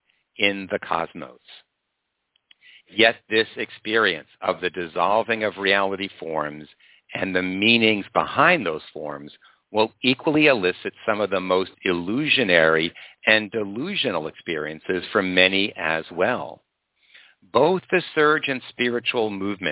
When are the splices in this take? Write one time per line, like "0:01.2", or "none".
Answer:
none